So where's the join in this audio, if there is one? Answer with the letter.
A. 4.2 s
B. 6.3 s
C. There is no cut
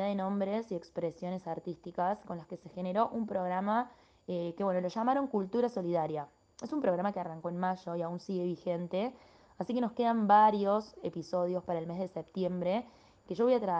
C